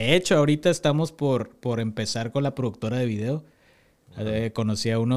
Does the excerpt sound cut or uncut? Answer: uncut